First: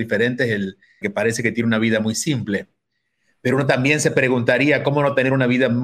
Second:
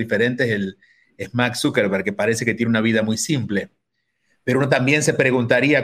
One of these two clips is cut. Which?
first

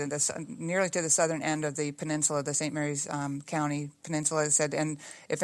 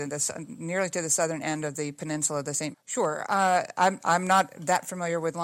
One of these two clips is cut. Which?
second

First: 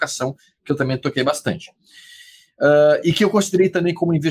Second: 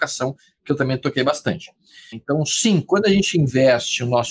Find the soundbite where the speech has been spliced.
second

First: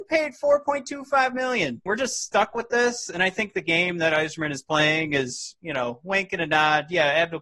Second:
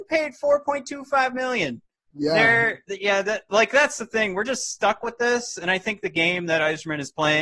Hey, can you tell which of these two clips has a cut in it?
first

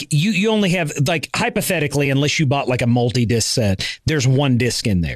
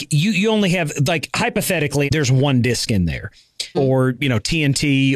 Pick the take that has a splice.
second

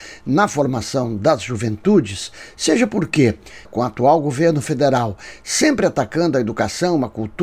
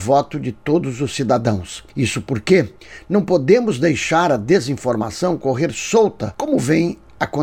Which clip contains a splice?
first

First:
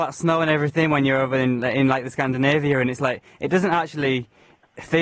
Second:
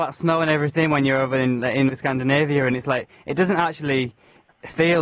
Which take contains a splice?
second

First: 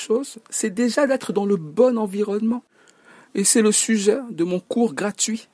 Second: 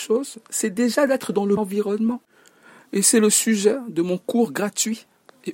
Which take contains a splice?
second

